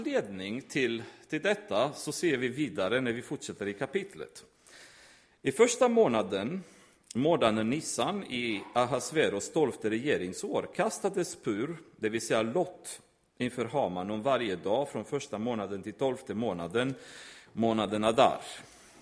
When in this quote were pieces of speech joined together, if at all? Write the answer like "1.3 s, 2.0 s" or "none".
none